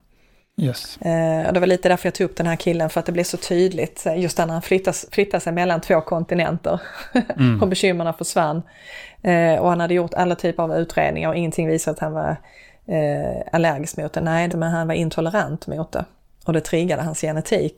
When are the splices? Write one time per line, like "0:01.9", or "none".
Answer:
0:14.5